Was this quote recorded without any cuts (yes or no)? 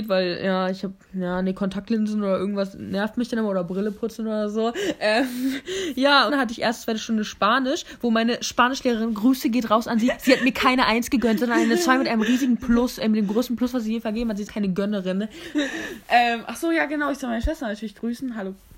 no